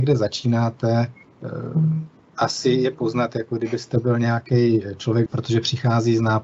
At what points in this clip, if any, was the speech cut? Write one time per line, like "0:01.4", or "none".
0:05.3